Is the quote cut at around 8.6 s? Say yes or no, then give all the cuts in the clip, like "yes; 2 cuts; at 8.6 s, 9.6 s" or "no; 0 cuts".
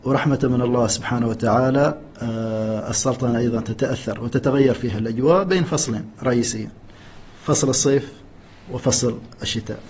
no; 1 cut; at 2.1 s